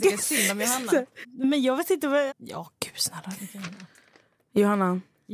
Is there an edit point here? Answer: yes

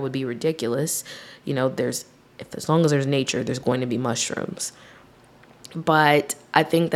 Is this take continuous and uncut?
yes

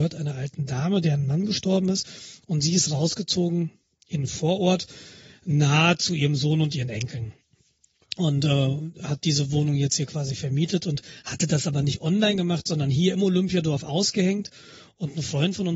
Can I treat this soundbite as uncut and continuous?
yes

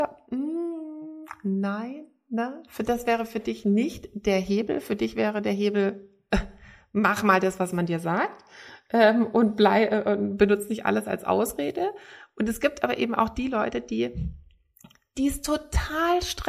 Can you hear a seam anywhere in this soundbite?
no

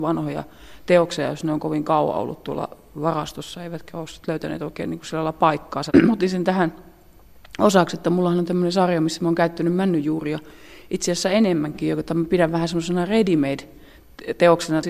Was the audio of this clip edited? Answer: yes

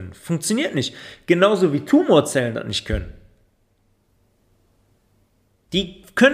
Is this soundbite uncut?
yes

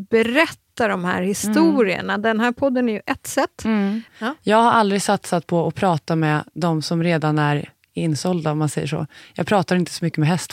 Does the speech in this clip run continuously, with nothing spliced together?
no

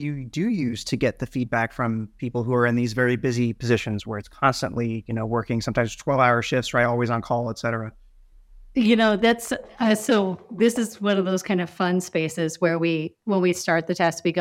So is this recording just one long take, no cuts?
yes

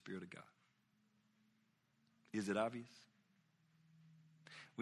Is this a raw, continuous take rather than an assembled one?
yes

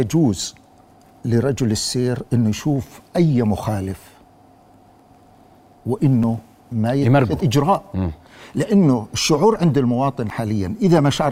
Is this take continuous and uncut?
yes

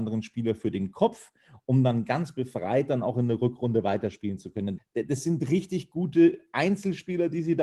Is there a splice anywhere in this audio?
yes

